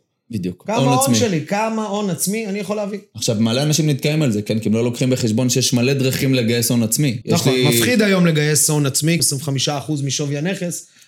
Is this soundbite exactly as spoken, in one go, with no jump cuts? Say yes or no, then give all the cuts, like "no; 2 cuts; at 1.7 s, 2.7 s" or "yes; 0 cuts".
no; 2 cuts; at 7.2 s, 9.2 s